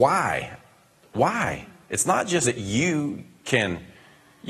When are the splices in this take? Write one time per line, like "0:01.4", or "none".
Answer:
0:02.4